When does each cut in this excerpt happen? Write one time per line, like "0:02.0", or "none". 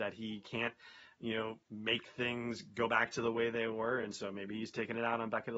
none